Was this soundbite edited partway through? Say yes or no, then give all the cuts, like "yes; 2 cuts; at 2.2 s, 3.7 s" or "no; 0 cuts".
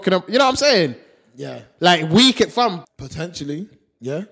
yes; 1 cut; at 2.8 s